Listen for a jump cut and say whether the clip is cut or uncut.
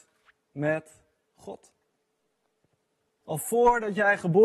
cut